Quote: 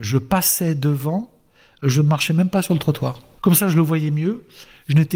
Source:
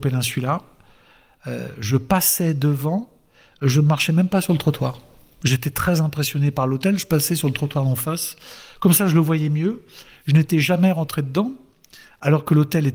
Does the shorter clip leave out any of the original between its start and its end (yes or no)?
yes